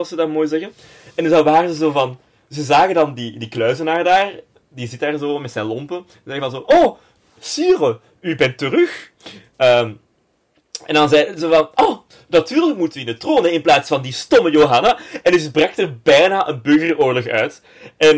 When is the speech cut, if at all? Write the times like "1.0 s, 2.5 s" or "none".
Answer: none